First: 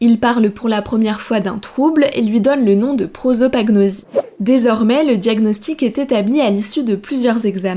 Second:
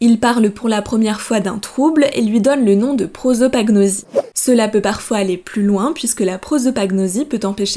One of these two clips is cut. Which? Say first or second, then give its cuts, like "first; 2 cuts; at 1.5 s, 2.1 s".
second; 1 cut; at 4.3 s